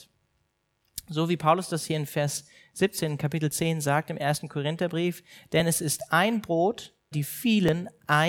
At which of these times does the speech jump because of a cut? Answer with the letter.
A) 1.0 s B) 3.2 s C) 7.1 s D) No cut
C